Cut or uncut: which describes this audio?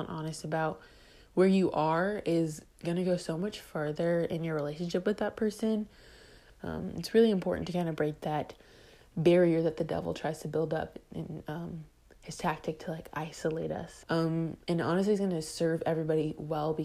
cut